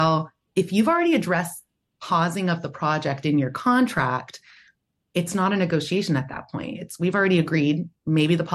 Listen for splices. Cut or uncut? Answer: uncut